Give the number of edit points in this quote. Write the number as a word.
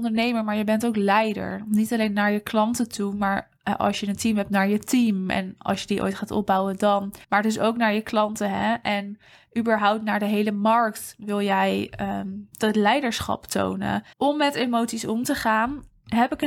two